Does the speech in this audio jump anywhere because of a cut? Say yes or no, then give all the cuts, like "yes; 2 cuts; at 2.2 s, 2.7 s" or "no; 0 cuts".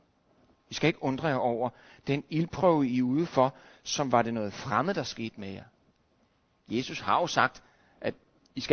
no; 0 cuts